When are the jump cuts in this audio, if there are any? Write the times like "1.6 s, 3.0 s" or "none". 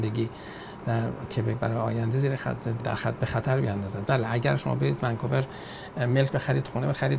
2.8 s